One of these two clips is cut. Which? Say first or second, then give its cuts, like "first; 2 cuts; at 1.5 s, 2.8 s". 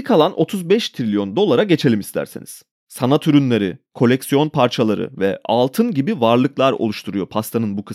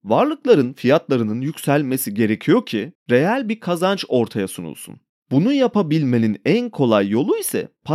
first; 1 cut; at 2.8 s